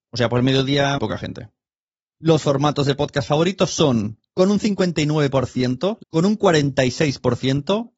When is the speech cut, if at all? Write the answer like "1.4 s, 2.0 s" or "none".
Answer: 1.0 s, 6.0 s